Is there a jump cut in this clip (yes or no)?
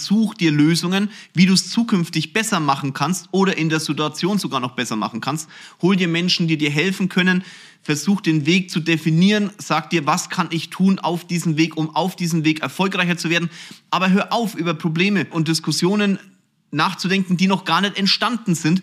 no